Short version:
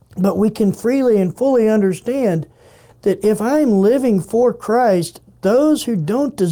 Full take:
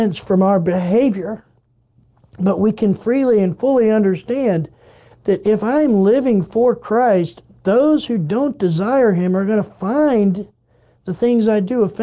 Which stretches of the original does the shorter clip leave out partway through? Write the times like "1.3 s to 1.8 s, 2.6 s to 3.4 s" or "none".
none